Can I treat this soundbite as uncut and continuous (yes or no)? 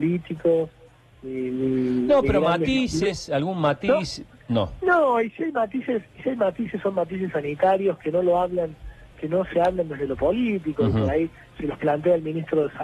yes